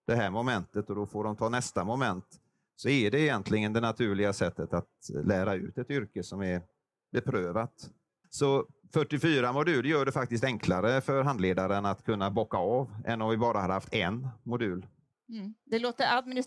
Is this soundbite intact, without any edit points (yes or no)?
no